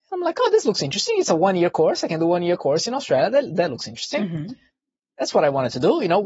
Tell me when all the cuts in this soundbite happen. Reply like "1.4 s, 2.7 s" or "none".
none